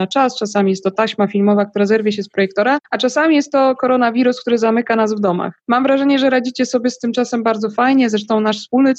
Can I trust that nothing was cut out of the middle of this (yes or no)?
yes